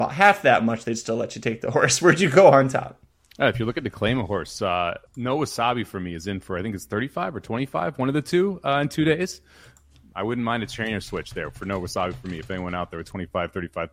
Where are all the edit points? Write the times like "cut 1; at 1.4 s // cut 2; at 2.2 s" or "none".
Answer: cut 1; at 5.1 s